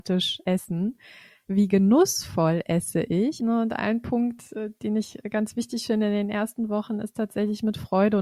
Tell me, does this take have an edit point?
yes; 2 cuts; at 1.4 s, 3.4 s

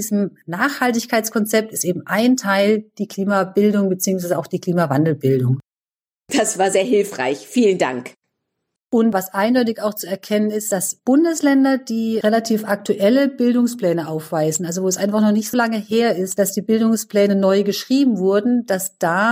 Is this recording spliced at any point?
yes; 2 cuts; at 8.8 s, 15.5 s

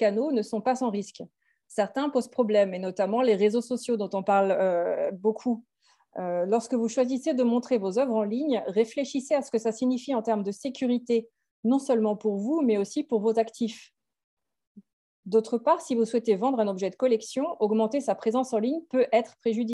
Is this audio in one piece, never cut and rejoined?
yes; 0 cuts

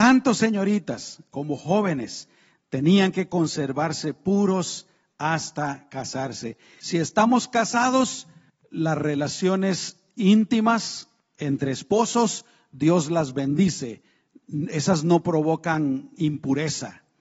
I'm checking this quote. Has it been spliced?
yes; 1 cut; at 6.8 s

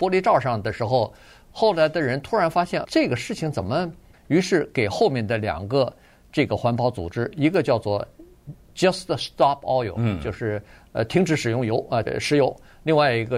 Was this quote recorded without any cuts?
no; 3 cuts; at 2.8 s, 4.1 s, 12.1 s

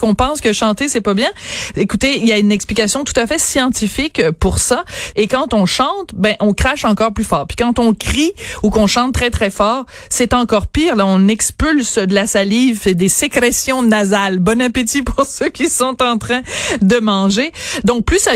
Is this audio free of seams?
no; 1 cut; at 5.1 s

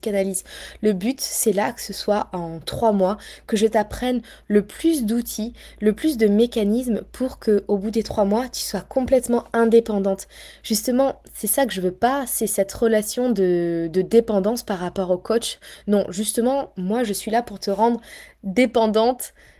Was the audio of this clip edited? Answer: no; 0 cuts

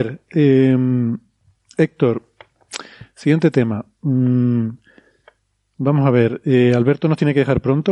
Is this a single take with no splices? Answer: yes; 0 cuts

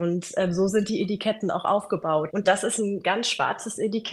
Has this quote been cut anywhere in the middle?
yes; 1 cut; at 2.3 s

